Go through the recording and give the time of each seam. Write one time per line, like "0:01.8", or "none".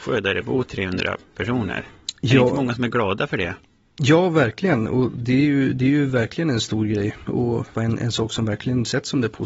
0:07.7